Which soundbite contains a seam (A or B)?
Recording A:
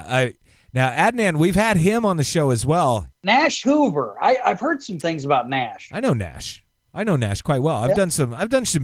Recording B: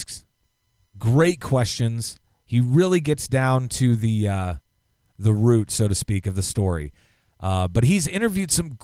A